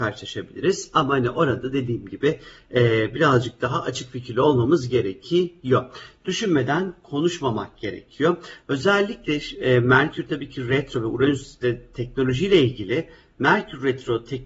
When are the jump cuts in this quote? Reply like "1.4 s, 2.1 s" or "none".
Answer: none